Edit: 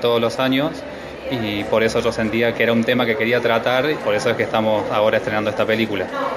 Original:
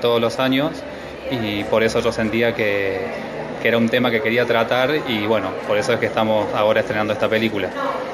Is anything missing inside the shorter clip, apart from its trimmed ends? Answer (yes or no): yes